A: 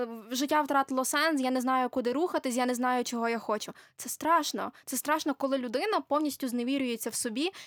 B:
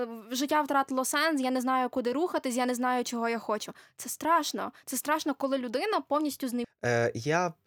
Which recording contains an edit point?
B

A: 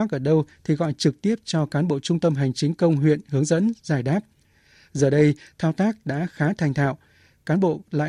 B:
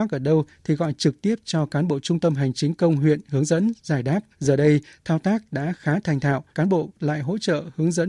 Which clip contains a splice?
B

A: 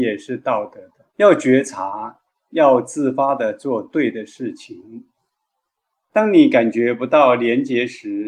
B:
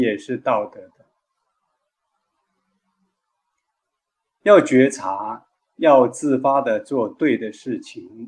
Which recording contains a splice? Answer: A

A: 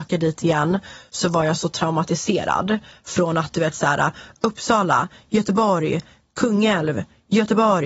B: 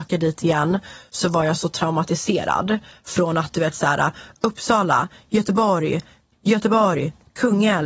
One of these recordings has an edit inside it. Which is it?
B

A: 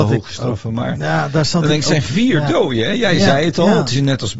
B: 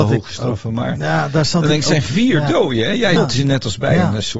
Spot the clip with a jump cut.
B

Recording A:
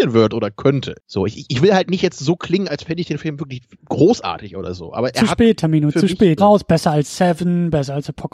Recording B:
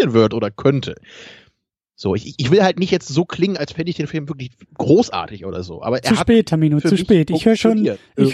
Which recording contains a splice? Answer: A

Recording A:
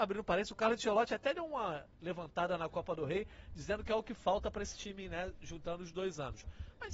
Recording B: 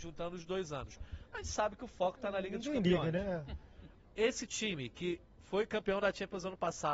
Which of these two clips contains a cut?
B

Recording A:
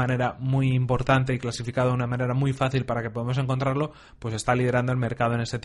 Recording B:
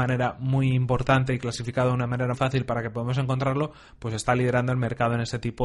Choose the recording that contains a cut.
B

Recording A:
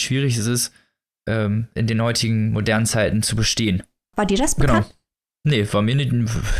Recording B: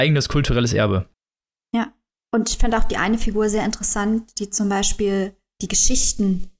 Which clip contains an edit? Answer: A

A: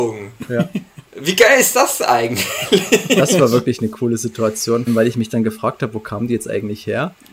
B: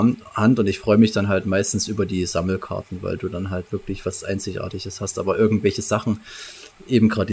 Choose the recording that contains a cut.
A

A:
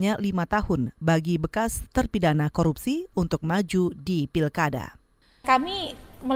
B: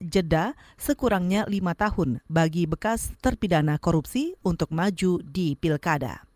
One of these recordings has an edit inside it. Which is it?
A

